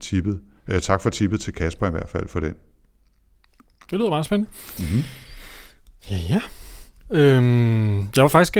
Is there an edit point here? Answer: no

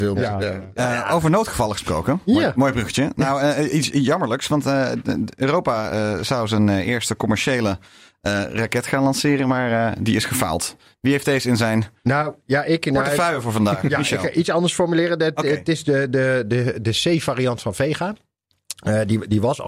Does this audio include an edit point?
no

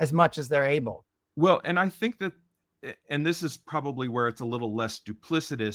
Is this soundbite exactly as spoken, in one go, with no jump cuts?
yes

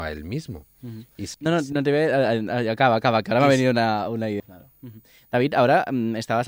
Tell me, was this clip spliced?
yes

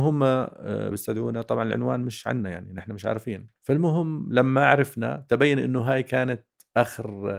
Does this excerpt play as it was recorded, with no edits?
no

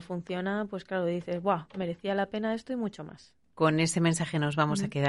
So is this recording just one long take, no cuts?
no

